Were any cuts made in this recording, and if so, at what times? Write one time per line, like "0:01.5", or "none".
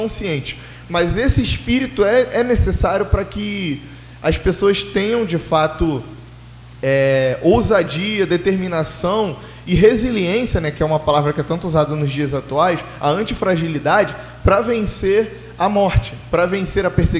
none